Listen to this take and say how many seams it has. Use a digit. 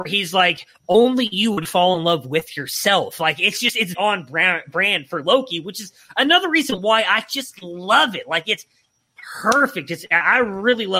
1